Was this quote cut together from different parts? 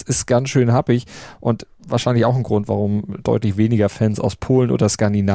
no; 0 cuts

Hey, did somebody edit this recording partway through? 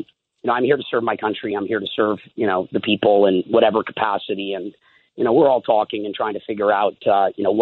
no; 0 cuts

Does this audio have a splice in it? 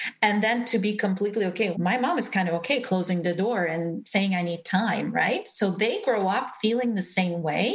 yes; 1 cut; at 1.7 s

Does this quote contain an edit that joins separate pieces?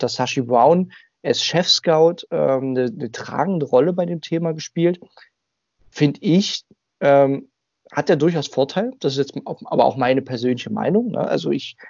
no; 0 cuts

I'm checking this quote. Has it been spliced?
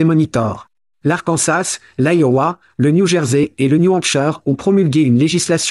no; 0 cuts

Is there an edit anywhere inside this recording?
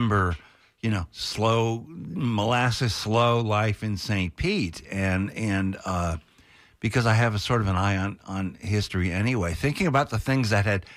no; 0 cuts

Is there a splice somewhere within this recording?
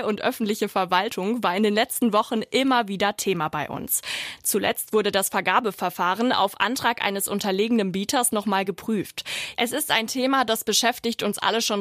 yes; 1 cut; at 9.5 s

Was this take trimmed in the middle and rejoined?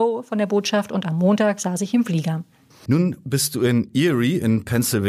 yes; 1 cut; at 2.9 s

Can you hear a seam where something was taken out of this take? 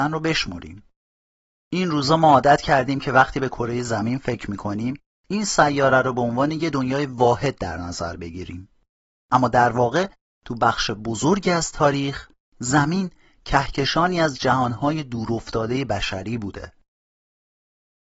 no; 0 cuts

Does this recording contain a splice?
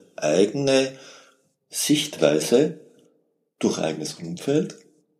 no; 0 cuts

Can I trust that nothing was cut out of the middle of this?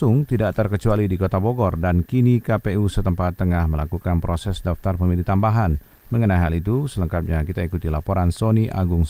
yes; 0 cuts

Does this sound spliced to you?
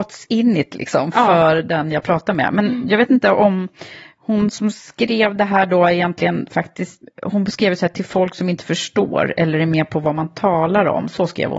yes; 1 cut; at 7.0 s

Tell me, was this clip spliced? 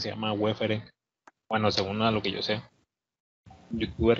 no; 0 cuts

